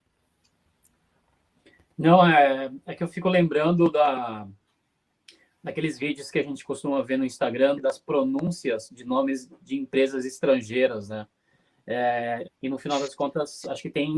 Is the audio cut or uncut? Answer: cut